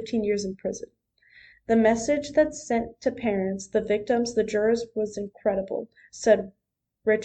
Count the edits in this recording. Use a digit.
1